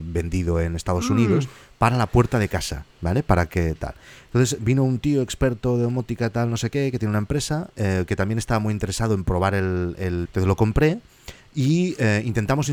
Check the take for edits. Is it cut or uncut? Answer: cut